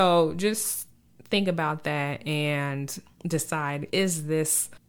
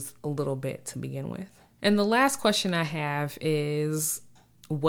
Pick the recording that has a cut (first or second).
first